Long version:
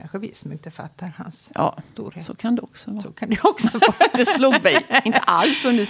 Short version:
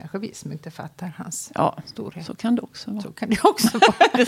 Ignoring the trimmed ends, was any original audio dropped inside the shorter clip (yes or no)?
no